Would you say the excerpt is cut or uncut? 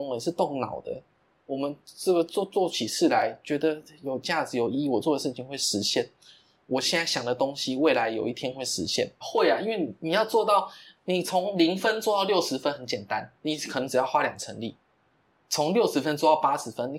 cut